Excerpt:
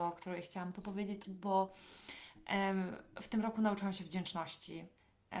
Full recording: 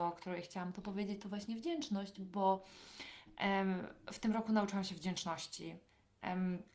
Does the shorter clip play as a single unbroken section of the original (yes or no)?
no